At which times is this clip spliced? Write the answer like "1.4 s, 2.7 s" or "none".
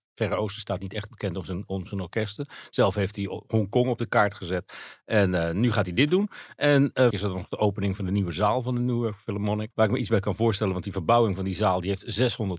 7.1 s, 9.7 s